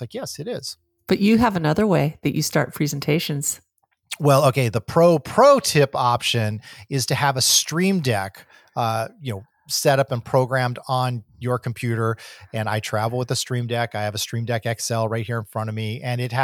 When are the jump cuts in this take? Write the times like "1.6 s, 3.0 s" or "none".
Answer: none